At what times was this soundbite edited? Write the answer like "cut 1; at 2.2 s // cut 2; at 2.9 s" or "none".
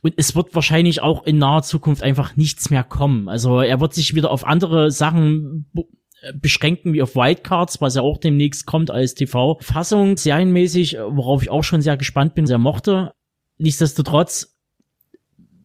cut 1; at 10.2 s // cut 2; at 12.5 s